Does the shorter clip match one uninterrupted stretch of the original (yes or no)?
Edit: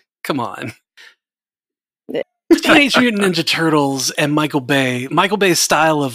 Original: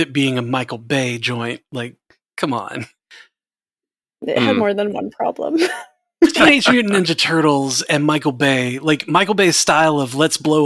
no